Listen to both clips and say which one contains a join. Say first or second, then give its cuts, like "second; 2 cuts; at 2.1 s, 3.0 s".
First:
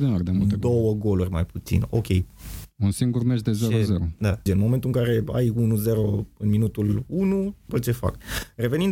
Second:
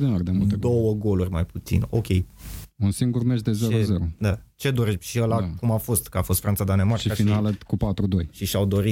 first; 2 cuts; at 4.5 s, 7.7 s